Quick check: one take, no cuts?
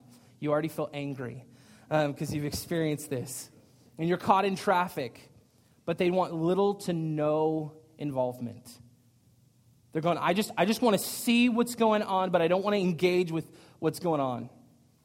yes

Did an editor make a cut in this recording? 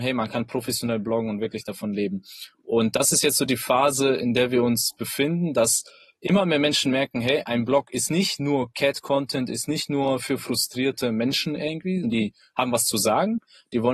yes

